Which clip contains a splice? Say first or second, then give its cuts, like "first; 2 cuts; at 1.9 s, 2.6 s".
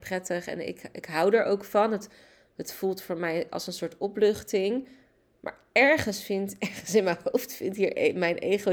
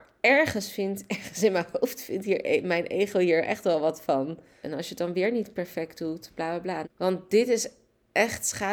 second; 2 cuts; at 4.6 s, 6.8 s